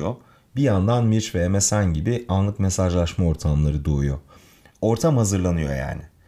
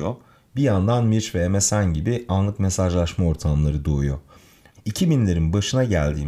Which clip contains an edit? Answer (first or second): second